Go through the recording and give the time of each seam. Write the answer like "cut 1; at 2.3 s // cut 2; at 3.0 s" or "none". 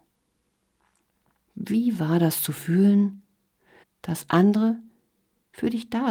cut 1; at 1.4 s // cut 2; at 3.8 s